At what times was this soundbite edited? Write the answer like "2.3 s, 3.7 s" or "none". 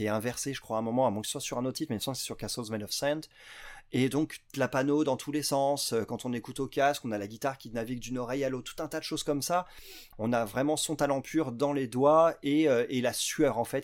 4.5 s, 10.1 s